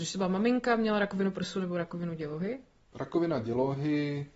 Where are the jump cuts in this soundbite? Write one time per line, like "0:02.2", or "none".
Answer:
0:02.9